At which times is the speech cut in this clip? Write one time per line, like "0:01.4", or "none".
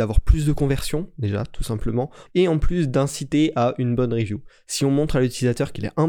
0:02.3